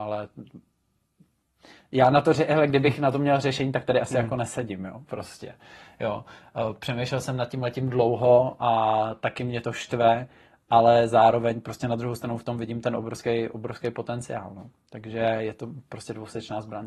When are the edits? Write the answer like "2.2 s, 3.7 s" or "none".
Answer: none